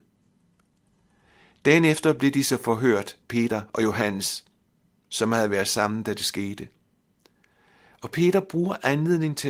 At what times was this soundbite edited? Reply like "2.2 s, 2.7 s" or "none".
none